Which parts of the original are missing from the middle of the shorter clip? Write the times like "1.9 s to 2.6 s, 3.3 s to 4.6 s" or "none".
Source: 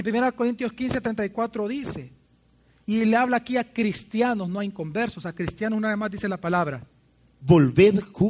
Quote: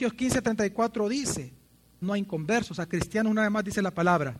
2.6 s to 4.5 s